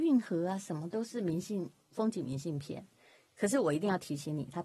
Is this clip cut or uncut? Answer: uncut